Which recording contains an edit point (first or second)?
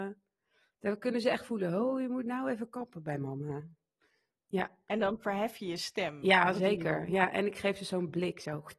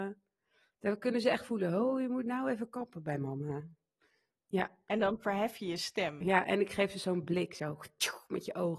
second